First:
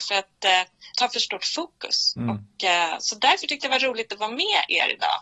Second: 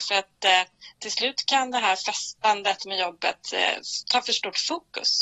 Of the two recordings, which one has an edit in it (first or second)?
first